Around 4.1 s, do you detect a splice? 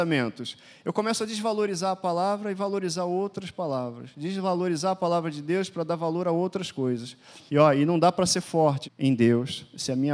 no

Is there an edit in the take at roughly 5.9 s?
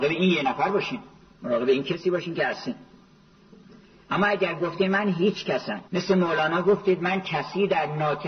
yes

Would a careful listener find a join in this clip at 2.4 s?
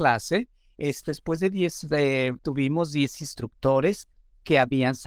yes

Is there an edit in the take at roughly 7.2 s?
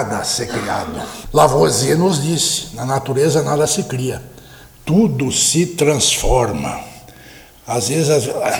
no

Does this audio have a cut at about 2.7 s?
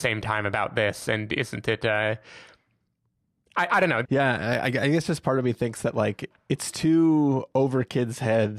no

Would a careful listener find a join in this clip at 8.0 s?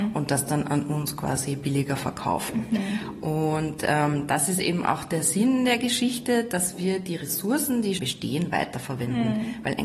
yes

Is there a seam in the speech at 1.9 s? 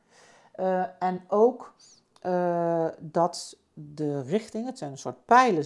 no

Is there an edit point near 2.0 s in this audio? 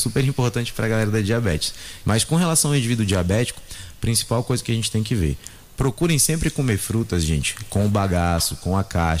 yes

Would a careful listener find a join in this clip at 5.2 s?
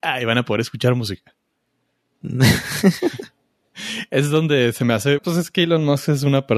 yes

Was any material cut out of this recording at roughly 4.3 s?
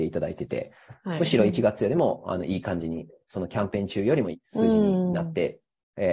yes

